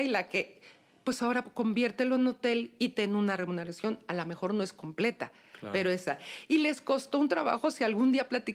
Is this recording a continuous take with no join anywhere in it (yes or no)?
yes